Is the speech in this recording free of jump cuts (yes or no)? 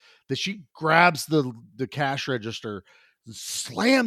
yes